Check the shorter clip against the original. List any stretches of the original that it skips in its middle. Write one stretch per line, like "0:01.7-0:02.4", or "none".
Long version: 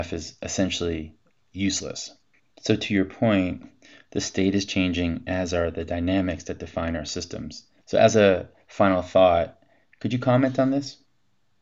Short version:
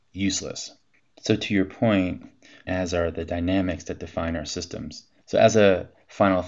0:04.0-0:05.2